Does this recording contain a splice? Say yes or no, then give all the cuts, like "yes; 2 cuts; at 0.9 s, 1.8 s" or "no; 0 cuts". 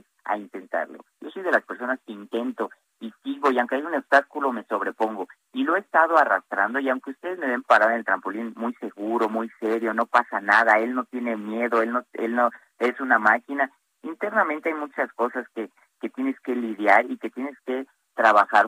no; 0 cuts